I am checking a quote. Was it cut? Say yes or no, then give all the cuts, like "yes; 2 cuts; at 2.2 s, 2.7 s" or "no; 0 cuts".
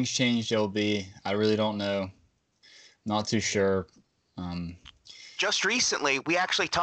no; 0 cuts